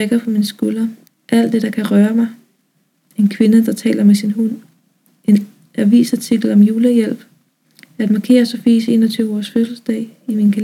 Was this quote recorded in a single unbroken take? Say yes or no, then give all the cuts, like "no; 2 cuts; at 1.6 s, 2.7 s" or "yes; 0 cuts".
no; 1 cut; at 1.1 s